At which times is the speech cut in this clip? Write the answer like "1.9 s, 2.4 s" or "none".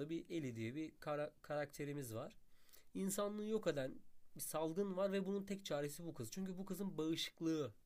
none